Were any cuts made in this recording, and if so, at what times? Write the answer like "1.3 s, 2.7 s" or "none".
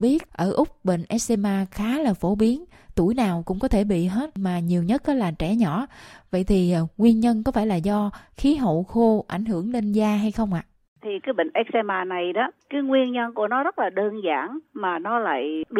12.6 s